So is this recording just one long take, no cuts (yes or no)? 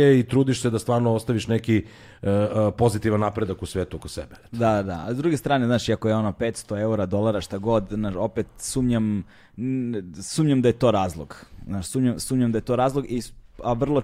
yes